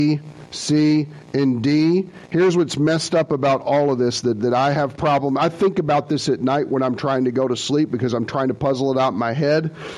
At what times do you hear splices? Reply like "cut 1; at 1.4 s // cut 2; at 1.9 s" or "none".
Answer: none